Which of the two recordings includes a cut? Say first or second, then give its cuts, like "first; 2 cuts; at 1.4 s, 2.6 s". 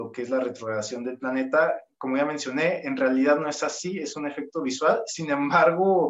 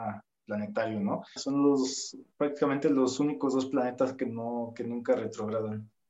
second; 1 cut; at 1.4 s